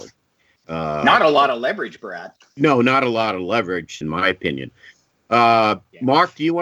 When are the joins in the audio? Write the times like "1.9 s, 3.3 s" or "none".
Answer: 4.0 s